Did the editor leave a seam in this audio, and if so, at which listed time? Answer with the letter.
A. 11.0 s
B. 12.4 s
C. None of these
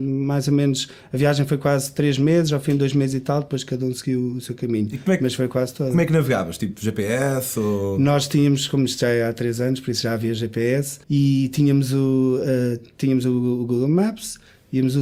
A